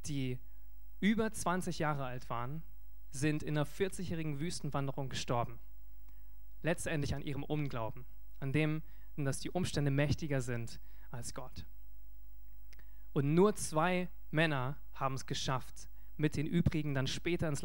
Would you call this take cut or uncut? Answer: cut